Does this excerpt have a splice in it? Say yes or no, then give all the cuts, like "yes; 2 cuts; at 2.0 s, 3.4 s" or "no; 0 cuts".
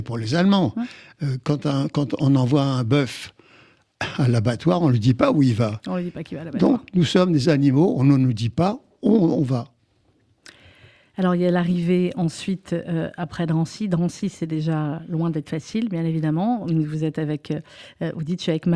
no; 0 cuts